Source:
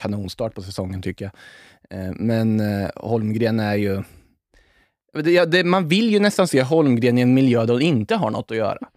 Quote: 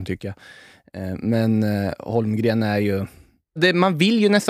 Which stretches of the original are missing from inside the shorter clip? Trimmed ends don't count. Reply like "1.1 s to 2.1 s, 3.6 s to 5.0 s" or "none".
4.5 s to 5.5 s